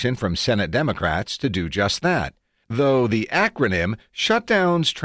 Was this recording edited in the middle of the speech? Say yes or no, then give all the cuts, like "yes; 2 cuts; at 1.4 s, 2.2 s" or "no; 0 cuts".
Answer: yes; 1 cut; at 2.6 s